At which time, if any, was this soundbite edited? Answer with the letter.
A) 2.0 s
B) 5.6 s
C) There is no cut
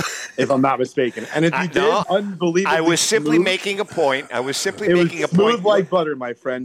A